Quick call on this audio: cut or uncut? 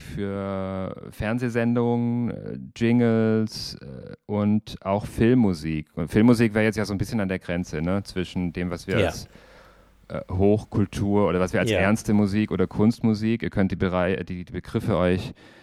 uncut